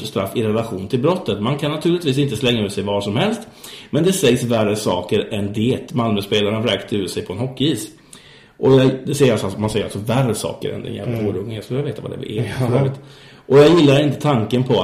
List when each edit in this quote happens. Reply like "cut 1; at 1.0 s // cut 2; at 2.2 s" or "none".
none